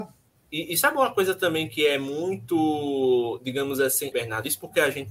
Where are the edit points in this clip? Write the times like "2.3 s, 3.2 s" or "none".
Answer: 4.1 s